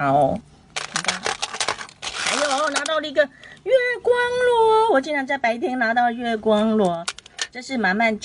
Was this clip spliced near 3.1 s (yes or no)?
no